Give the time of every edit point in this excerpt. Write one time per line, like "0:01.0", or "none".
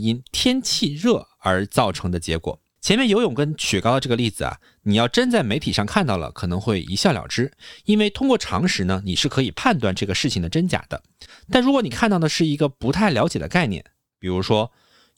0:02.8